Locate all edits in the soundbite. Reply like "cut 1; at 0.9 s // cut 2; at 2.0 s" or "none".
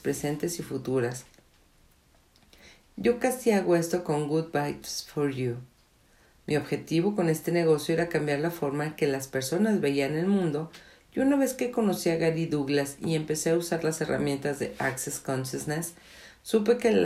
cut 1; at 2.8 s